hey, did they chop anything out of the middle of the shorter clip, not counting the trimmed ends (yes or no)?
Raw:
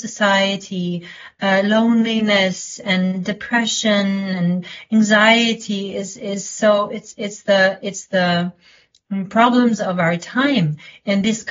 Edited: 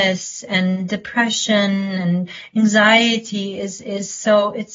no